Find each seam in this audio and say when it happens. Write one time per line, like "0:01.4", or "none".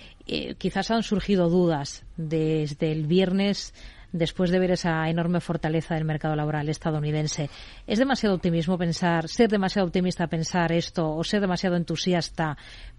none